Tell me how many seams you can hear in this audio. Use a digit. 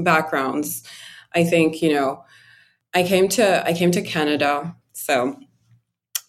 1